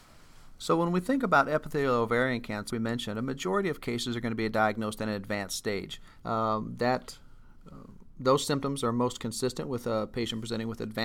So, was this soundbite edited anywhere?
yes; 2 cuts; at 2.7 s, 6.2 s

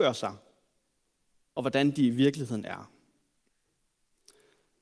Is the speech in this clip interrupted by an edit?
no; 0 cuts

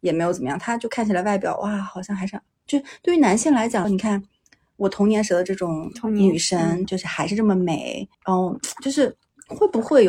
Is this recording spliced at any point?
yes; 3 cuts; at 3.8 s, 6.8 s, 8.1 s

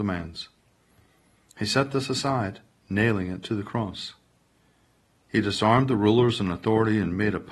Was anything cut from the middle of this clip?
no; 0 cuts

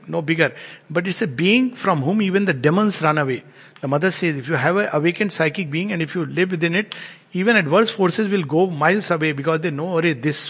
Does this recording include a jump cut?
no; 0 cuts

